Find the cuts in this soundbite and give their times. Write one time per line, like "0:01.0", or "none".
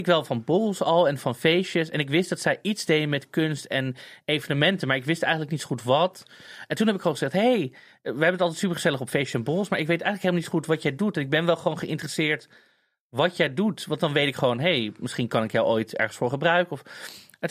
none

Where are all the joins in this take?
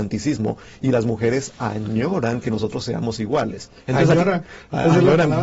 0:03.8

